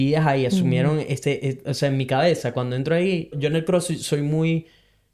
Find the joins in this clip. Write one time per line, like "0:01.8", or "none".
0:03.3